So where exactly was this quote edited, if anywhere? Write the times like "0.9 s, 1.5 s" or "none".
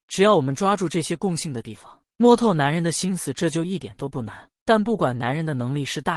4.6 s